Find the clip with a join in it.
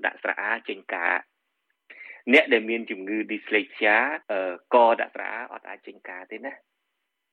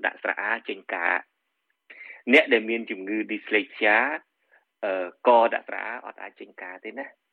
first; 1 cut; at 4.2 s

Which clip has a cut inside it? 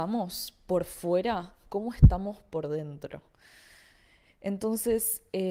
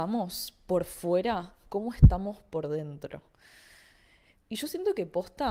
second; 1 cut; at 4.4 s

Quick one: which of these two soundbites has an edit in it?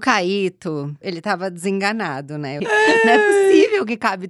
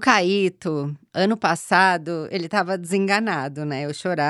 first; 2 cuts; at 1.0 s, 2.6 s

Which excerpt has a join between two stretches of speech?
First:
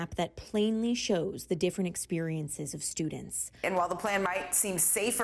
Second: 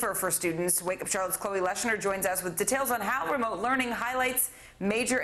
first; 1 cut; at 3.6 s

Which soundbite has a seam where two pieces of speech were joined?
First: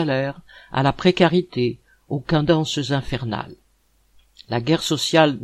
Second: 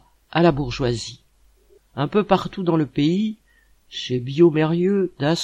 second; 1 cut; at 1.8 s

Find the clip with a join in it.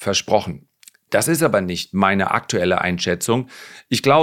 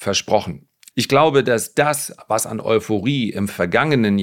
second; 1 cut; at 0.9 s

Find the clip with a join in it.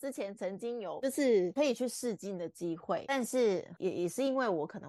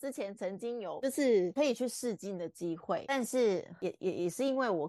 first; 1 cut; at 3.8 s

